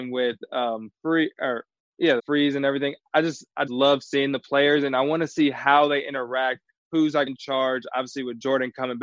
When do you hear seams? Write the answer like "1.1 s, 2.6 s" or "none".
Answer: 2.2 s, 3.7 s, 7.3 s